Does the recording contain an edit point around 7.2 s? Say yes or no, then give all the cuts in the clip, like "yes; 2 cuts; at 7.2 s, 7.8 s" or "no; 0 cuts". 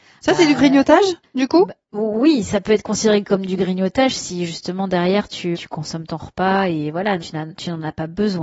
yes; 2 cuts; at 5.5 s, 7.2 s